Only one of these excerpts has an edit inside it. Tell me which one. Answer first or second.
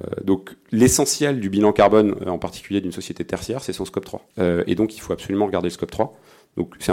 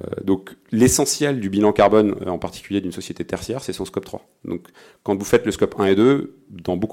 first